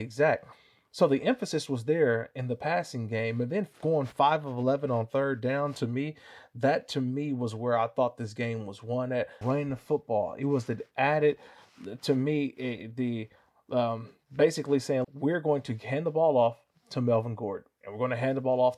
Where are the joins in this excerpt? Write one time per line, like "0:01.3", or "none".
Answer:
0:09.4
0:15.0